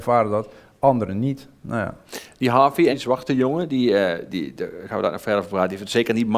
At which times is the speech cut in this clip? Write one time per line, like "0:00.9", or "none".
0:02.9